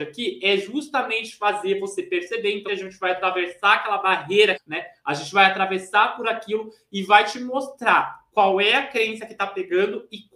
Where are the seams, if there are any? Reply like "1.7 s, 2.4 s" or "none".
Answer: 2.7 s, 4.5 s